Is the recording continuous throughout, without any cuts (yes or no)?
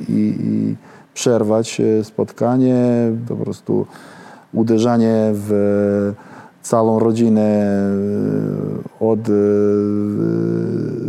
no